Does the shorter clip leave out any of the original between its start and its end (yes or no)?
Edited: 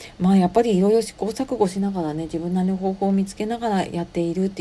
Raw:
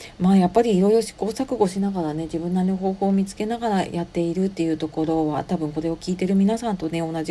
no